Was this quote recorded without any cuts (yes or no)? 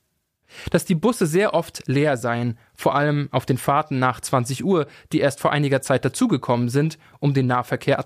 yes